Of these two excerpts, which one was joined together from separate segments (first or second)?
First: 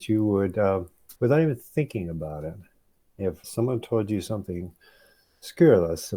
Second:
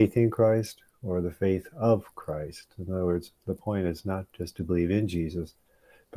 first